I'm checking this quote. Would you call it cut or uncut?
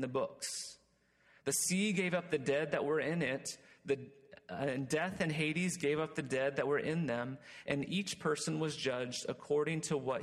uncut